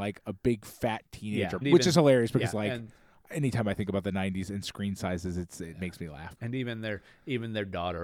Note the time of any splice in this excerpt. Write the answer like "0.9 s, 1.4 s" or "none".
1.6 s, 6.4 s

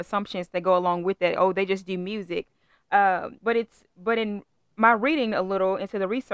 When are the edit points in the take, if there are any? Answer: 3.4 s

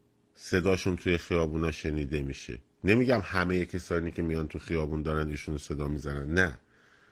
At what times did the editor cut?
none

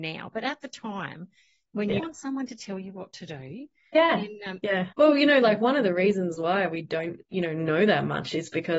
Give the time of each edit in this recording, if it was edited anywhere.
2.0 s, 4.9 s, 7.2 s

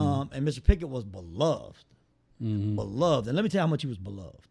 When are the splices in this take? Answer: none

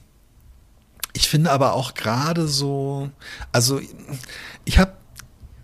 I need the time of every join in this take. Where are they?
none

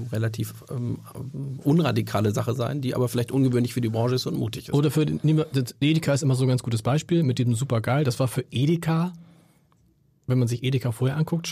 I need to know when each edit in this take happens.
none

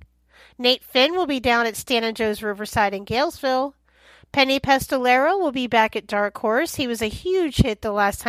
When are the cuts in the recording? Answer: none

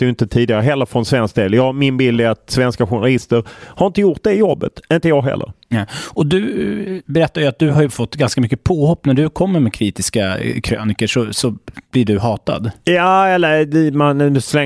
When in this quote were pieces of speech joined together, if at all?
none

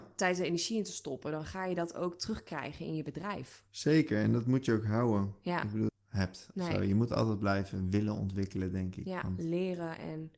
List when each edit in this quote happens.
5.9 s

